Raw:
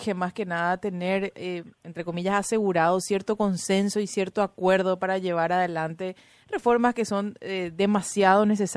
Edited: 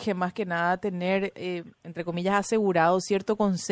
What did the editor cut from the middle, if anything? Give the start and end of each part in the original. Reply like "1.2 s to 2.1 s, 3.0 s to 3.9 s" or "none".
none